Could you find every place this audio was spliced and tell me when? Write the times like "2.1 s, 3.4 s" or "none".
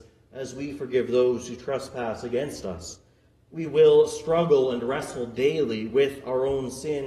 3.5 s